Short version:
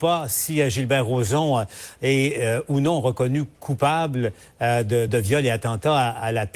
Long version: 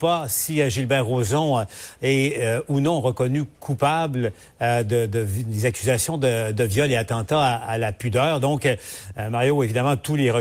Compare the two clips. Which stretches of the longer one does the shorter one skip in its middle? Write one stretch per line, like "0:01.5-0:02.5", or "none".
0:05.1-0:06.5